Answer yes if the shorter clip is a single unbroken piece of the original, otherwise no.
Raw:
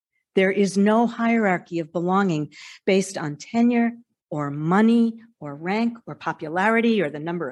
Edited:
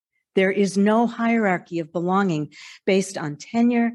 yes